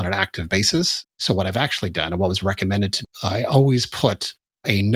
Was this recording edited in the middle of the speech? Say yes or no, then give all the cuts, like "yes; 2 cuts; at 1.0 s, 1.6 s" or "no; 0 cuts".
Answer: yes; 2 cuts; at 1.1 s, 3.0 s